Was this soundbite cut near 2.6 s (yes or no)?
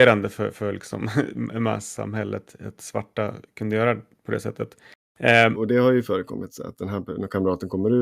no